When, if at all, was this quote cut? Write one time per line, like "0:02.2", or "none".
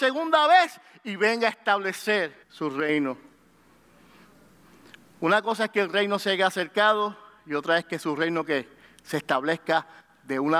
0:02.4